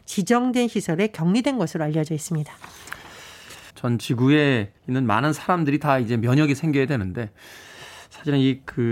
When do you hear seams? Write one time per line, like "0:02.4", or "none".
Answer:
0:03.7
0:04.8

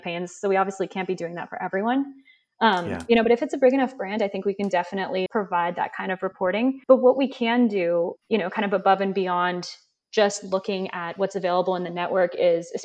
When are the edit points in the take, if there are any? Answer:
0:05.3
0:06.8
0:08.2

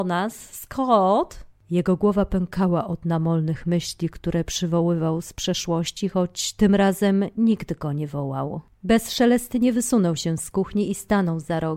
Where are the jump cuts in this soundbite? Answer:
none

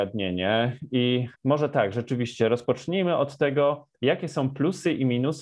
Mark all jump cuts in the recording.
0:01.3

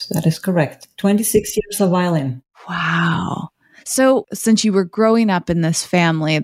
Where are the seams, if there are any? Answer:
none

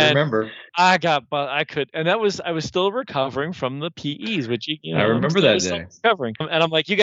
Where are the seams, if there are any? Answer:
none

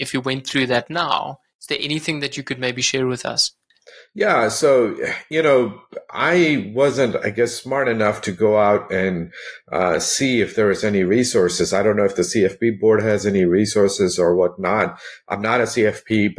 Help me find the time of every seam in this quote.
none

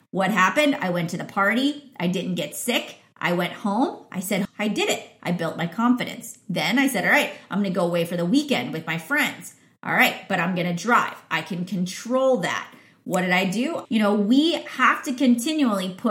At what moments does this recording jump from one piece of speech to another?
0:04.4
0:13.9

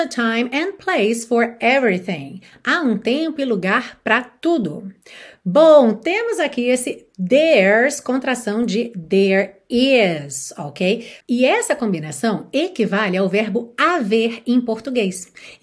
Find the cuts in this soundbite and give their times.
0:11.2

